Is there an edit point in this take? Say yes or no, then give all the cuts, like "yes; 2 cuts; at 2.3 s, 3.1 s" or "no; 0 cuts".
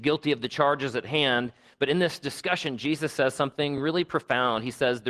no; 0 cuts